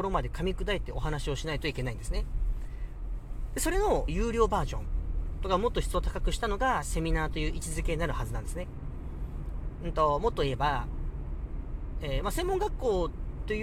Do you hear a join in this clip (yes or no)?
yes